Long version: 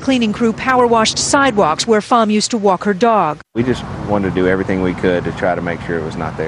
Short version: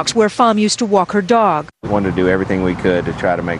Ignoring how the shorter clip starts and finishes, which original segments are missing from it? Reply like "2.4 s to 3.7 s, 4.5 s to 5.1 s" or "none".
3.6 s to 4.0 s